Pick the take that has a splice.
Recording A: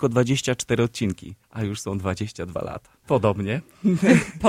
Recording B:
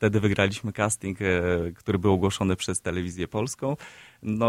A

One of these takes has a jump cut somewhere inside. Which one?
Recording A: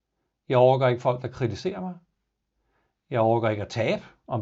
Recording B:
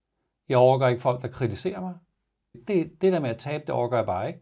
B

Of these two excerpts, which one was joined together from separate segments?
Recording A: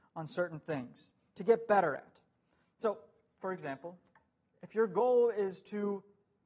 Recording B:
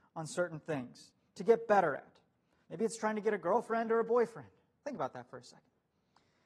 B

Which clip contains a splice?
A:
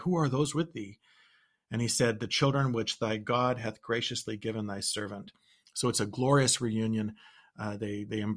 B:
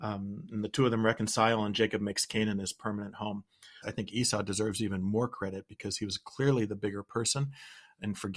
B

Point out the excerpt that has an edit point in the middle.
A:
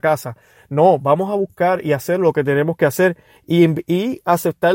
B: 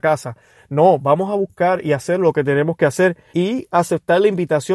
B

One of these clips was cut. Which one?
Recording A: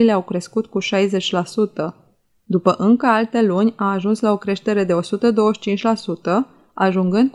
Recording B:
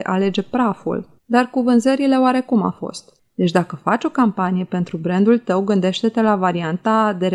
B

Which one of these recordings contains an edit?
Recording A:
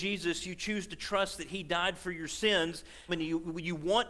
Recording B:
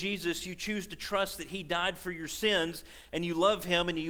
A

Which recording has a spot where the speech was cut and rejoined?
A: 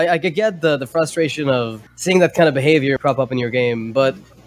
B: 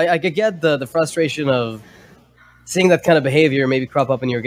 A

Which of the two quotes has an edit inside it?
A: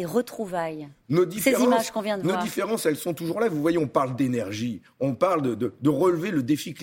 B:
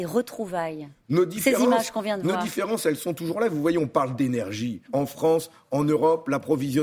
B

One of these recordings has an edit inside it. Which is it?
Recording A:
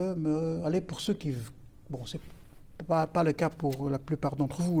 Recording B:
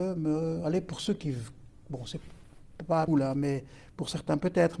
B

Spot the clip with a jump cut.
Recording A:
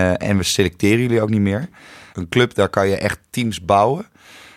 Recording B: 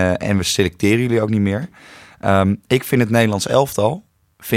A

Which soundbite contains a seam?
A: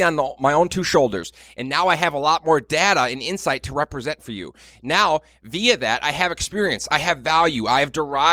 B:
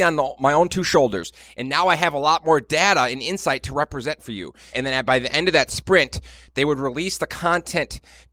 B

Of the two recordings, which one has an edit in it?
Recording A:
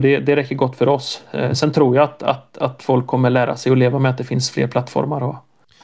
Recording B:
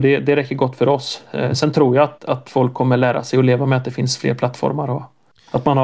B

